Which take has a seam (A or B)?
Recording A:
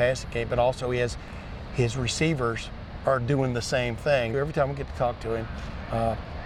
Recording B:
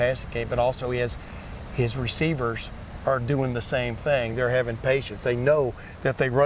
A